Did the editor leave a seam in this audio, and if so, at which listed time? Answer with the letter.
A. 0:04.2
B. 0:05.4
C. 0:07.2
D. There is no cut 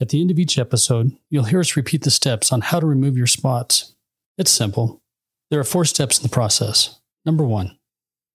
D